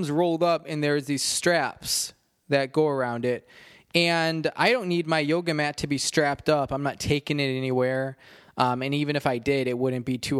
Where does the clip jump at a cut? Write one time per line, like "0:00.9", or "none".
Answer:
none